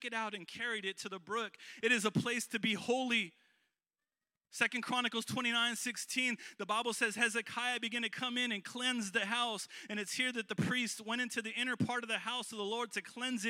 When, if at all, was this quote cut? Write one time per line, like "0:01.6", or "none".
0:01.8